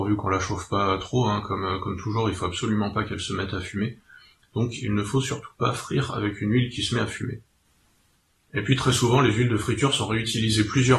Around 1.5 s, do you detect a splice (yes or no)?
no